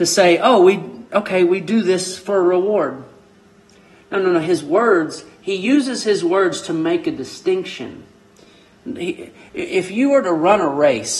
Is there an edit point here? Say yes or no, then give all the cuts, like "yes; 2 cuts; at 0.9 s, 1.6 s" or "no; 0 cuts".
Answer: no; 0 cuts